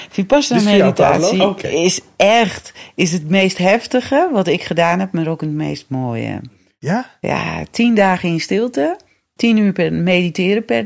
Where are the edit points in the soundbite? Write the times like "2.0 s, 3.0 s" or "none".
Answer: 9.4 s

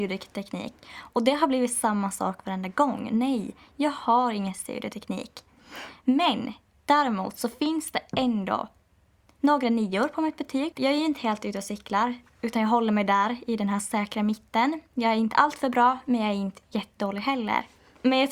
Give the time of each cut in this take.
10.7 s

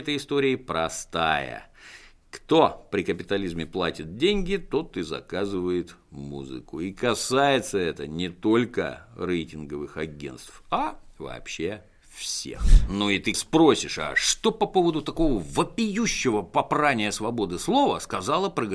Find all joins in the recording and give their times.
13.3 s

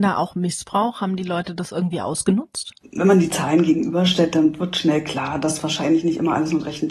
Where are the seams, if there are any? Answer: none

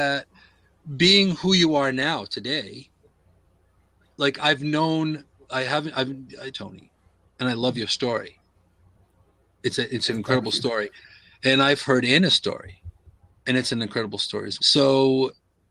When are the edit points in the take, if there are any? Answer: 6.5 s, 14.6 s

